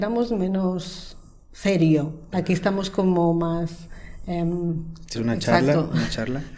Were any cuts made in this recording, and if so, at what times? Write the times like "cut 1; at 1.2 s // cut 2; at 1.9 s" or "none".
cut 1; at 2.3 s // cut 2; at 5.1 s